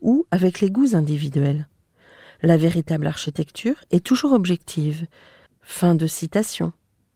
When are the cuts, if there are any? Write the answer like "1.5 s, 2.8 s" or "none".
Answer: 5.5 s